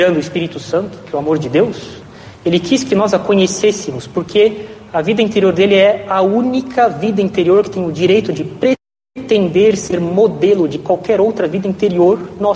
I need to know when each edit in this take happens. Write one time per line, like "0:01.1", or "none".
none